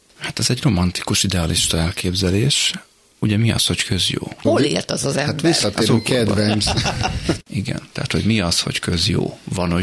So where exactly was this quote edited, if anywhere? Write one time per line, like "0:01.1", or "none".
0:04.4
0:07.5